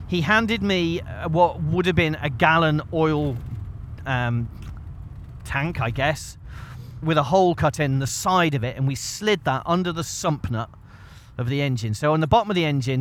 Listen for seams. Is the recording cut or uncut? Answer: cut